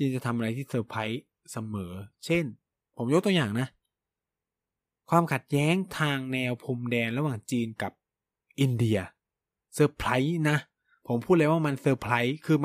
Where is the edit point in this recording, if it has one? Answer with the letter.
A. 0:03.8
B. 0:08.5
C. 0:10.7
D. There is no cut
D